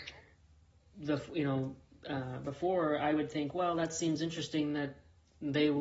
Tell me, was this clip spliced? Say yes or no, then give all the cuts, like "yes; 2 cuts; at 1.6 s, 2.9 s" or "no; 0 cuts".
no; 0 cuts